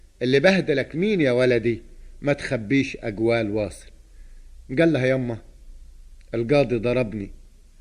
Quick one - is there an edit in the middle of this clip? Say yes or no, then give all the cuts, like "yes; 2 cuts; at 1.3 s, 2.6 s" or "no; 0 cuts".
no; 0 cuts